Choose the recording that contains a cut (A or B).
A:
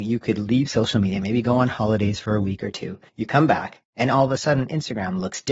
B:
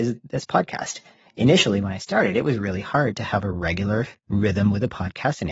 A